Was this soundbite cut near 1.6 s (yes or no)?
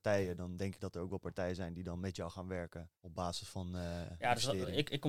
no